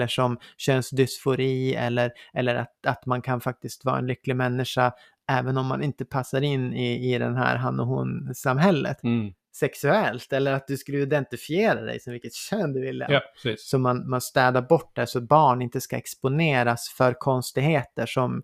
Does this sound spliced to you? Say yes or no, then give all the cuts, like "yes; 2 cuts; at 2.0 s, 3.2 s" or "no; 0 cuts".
yes; 2 cuts; at 9.0 s, 13.1 s